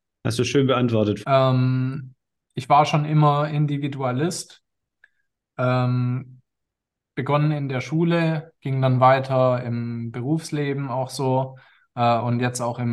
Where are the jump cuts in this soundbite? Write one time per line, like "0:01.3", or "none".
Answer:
0:01.2